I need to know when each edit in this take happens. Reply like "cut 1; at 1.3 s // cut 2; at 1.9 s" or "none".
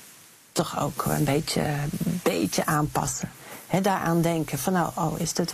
none